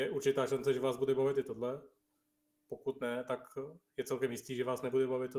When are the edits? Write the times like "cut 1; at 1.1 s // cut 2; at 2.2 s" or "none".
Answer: none

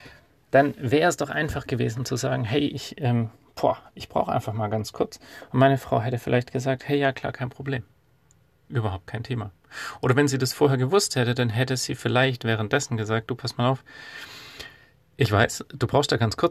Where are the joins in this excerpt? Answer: none

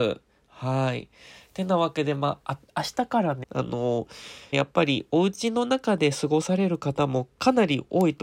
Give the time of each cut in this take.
cut 1; at 3.4 s // cut 2; at 4.5 s

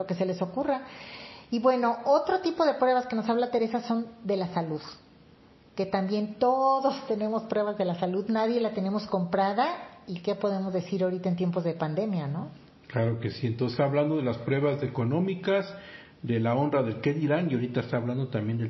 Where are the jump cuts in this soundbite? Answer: none

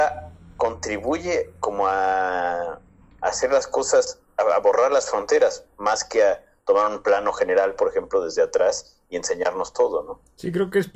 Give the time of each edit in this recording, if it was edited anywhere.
none

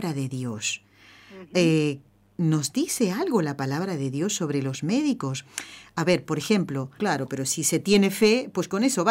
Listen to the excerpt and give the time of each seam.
cut 1; at 7.0 s

